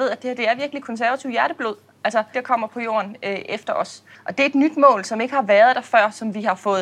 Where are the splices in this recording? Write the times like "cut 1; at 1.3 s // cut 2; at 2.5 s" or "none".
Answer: cut 1; at 2.3 s // cut 2; at 4.1 s